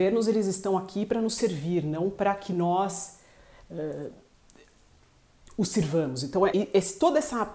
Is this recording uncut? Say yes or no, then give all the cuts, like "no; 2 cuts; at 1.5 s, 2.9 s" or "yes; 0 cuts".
no; 1 cut; at 6.5 s